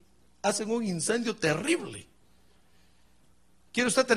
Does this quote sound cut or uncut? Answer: uncut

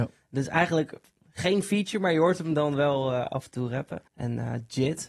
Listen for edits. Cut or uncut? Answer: cut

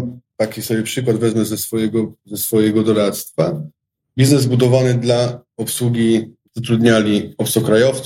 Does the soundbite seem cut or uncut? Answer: cut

